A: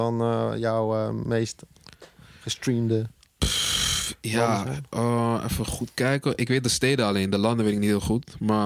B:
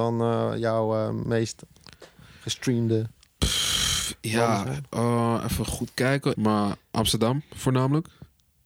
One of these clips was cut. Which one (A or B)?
B